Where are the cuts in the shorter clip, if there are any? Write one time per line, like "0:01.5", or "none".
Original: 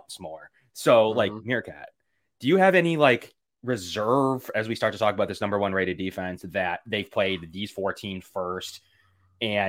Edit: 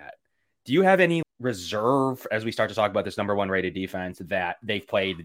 0:01.2